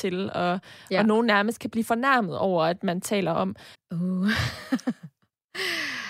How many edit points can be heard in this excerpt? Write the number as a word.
one